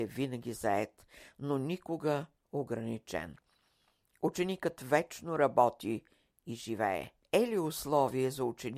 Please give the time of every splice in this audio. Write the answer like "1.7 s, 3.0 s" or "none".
7.2 s